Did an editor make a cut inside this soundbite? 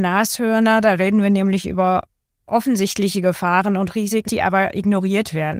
yes; 1 cut; at 4.3 s

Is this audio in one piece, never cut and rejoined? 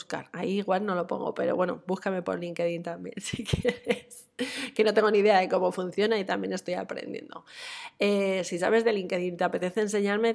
yes; 0 cuts

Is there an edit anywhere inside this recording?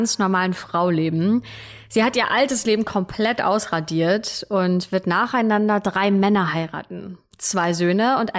no; 0 cuts

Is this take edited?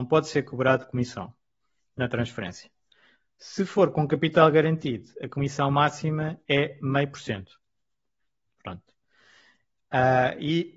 no; 0 cuts

